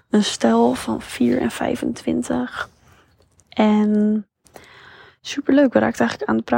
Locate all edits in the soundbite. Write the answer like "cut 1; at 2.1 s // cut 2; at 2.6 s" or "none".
none